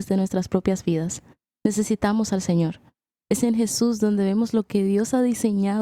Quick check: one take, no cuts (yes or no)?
no